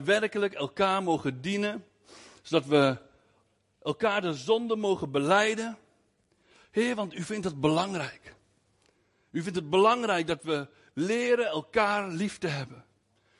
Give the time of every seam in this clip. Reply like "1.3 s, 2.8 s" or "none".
none